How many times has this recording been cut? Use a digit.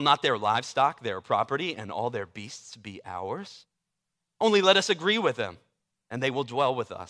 0